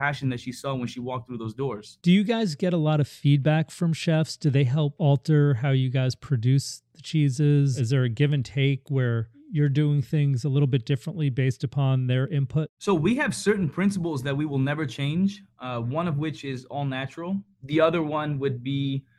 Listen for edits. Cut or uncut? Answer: uncut